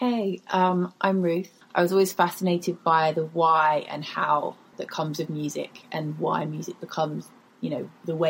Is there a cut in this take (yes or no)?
yes